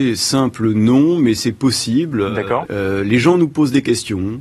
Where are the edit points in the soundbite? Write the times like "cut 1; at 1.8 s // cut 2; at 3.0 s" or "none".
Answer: cut 1; at 2.7 s